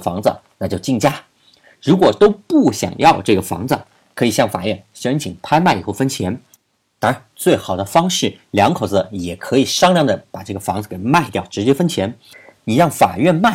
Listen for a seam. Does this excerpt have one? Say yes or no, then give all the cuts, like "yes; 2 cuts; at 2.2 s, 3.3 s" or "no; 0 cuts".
no; 0 cuts